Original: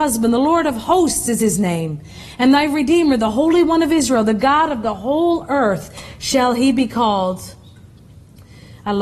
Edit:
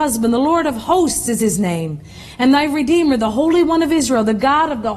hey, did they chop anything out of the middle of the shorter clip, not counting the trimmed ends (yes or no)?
no